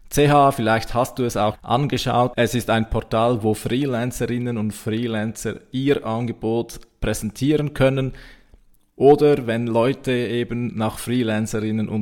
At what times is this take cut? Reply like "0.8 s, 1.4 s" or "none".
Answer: 1.5 s